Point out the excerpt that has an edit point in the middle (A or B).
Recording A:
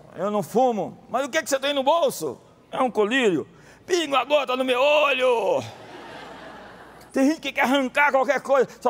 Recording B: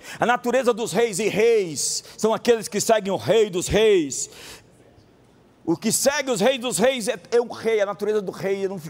A